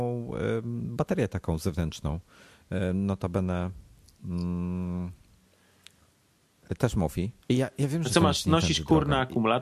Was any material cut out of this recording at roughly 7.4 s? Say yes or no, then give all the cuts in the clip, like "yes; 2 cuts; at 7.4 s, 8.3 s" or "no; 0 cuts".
yes; 1 cut; at 7.4 s